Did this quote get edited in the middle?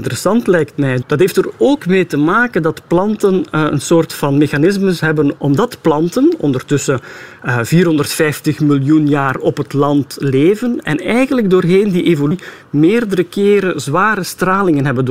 yes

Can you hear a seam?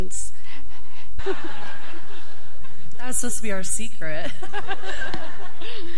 yes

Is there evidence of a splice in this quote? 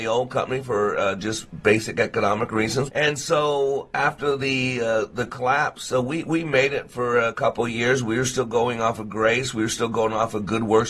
yes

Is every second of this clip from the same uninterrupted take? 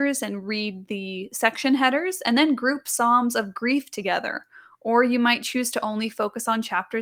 yes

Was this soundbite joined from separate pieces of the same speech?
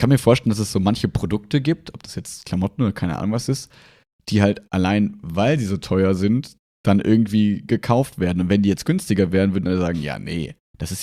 no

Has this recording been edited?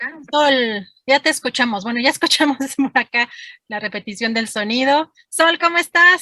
no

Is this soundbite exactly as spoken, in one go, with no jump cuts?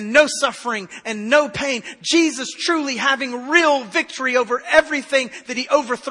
yes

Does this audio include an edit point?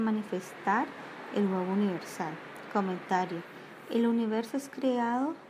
no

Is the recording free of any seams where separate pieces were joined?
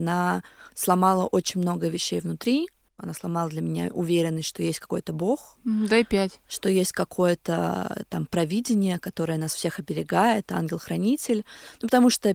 yes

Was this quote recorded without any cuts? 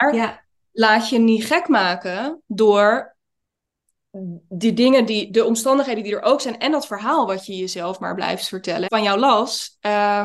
no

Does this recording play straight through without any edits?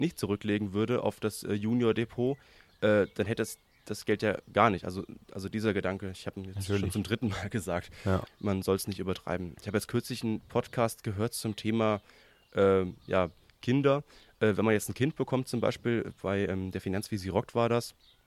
no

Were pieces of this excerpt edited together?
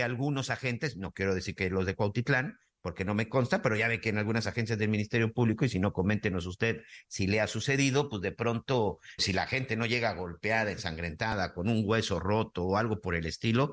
yes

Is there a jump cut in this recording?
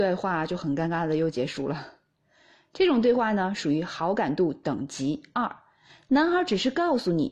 no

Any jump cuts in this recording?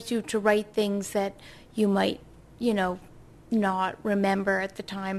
no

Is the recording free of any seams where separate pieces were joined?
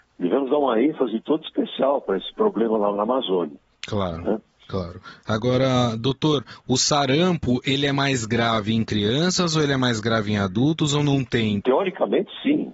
no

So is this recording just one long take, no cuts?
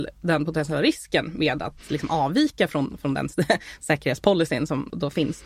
yes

